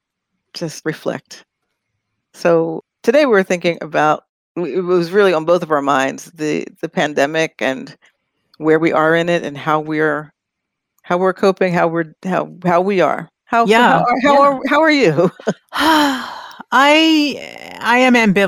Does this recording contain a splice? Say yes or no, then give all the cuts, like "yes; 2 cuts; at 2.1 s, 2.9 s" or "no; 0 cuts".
no; 0 cuts